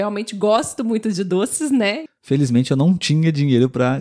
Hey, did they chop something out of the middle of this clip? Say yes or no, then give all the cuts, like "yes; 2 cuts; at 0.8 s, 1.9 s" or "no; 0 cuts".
yes; 1 cut; at 2.1 s